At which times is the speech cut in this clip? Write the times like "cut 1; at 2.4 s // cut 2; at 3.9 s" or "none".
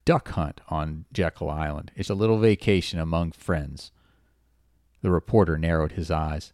cut 1; at 2.0 s